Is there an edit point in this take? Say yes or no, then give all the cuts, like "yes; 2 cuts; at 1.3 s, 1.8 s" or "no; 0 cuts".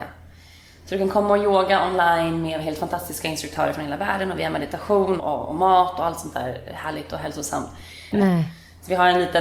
yes; 2 cuts; at 5.2 s, 8.1 s